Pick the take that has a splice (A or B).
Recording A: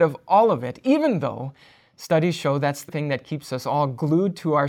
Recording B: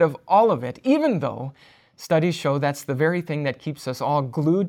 A